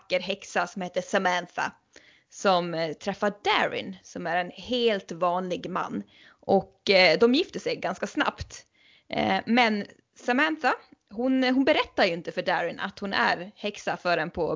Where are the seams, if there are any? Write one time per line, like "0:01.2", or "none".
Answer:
none